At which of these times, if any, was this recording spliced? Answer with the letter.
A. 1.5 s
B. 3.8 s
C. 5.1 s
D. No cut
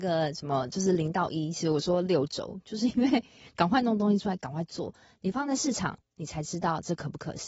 D